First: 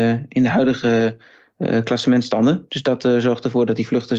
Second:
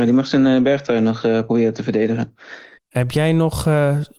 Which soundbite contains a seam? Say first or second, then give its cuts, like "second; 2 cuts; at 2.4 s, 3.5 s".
second; 1 cut; at 2.8 s